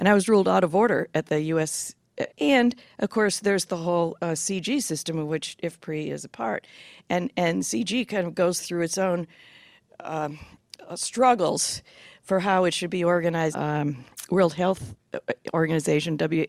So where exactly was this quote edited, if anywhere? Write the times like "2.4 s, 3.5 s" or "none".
2.3 s, 13.5 s

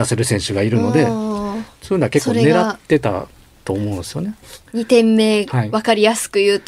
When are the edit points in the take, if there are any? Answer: none

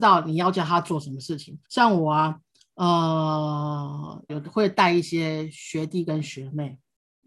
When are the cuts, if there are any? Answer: 1.6 s, 4.3 s

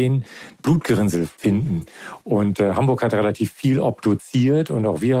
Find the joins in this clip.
2.2 s

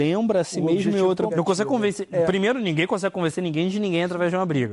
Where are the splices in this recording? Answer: 1.3 s

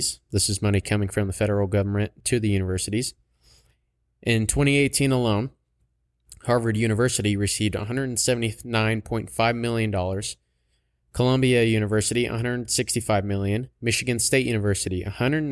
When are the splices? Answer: none

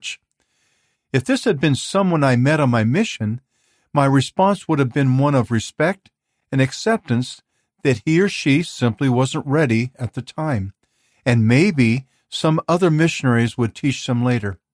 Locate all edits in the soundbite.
0.9 s

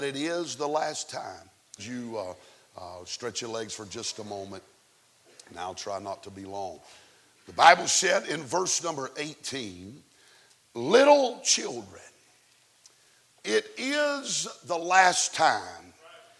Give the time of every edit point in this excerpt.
1.8 s

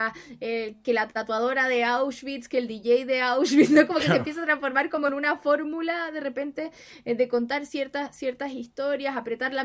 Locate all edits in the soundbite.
none

